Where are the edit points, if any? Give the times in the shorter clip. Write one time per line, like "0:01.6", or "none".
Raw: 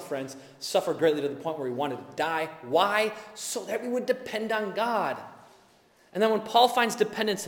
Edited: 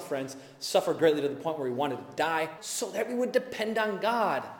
0:02.6